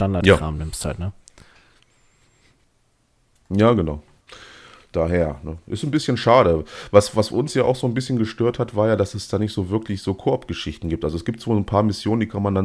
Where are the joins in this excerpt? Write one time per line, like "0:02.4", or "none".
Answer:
none